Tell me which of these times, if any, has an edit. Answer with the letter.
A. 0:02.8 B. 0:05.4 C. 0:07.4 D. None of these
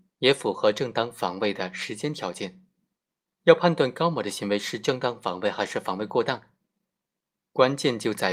D